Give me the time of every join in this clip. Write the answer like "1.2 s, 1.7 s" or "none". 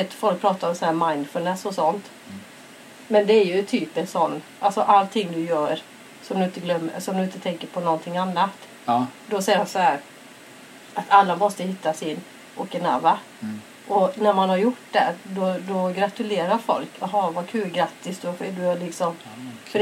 none